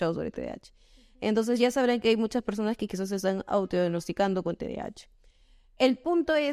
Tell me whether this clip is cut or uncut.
uncut